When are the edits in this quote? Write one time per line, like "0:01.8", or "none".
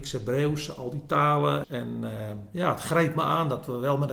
0:01.6

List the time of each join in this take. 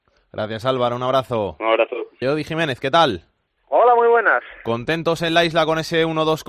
0:02.2

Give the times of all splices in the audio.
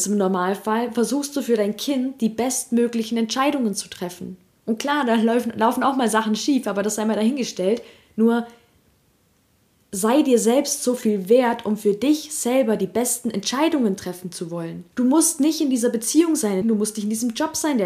0:14.9
0:16.6

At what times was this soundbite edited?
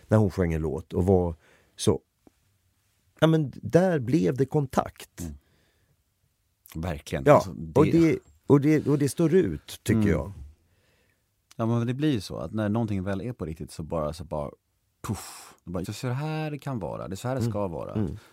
0:15.8

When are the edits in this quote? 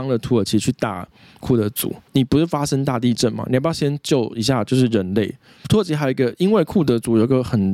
0:05.6

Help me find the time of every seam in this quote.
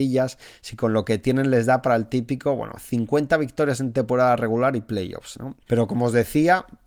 0:05.6

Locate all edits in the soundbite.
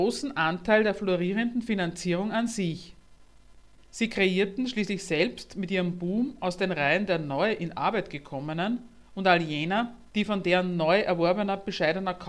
0:03.8
0:10.1

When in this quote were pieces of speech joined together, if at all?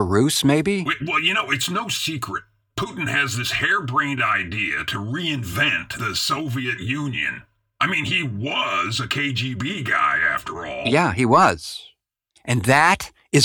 none

